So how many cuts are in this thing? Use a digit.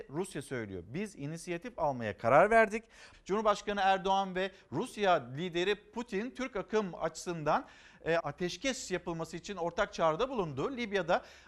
2